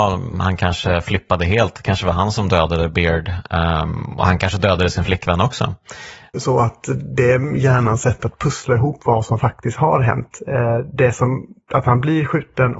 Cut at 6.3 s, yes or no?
yes